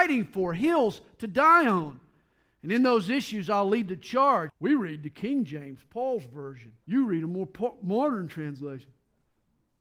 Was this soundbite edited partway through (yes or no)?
yes